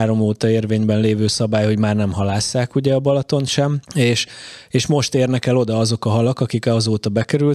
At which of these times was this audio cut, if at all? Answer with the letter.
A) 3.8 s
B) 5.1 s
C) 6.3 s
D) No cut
A